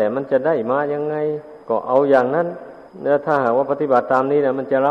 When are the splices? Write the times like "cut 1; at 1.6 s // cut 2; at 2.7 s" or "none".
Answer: cut 1; at 1.6 s // cut 2; at 2.9 s

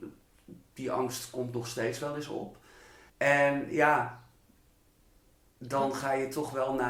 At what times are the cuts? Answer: cut 1; at 3.1 s

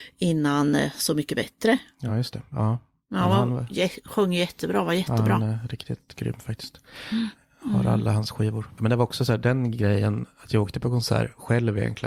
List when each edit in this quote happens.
none

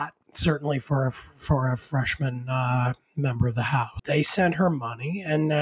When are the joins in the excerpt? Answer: cut 1; at 4.0 s

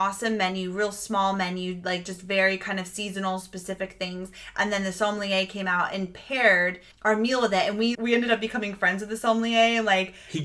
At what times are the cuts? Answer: cut 1; at 6.9 s // cut 2; at 7.9 s

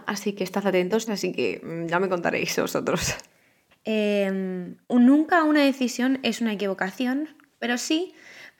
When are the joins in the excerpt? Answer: cut 1; at 1.1 s // cut 2; at 3.7 s // cut 3; at 4.8 s

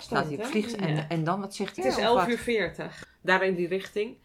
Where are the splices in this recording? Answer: cut 1; at 1.8 s // cut 2; at 3.0 s

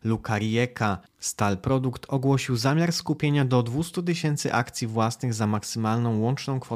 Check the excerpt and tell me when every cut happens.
cut 1; at 1.1 s

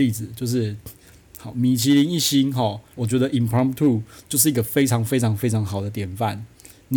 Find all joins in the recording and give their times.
cut 1; at 3.0 s

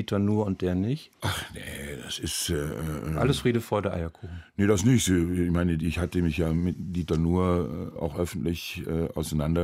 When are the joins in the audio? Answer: cut 1; at 1.1 s // cut 2; at 8.0 s

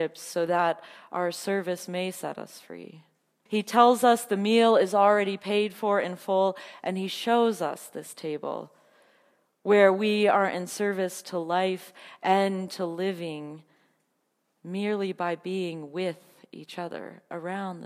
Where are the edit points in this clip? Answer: cut 1; at 3.5 s

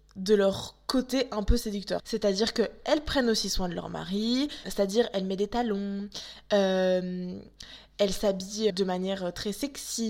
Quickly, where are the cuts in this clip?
cut 1; at 2.0 s // cut 2; at 4.6 s // cut 3; at 8.7 s

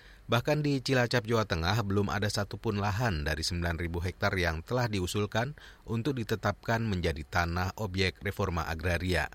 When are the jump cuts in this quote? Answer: none

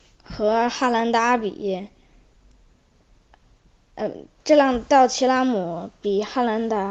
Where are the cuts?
none

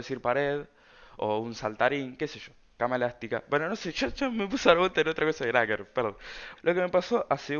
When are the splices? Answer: cut 1; at 6.6 s

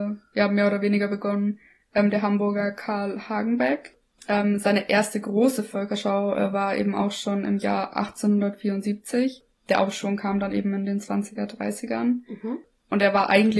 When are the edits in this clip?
none

